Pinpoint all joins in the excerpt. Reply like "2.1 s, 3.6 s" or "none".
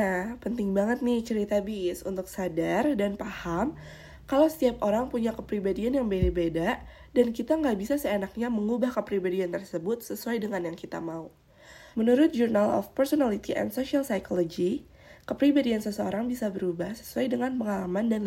11.9 s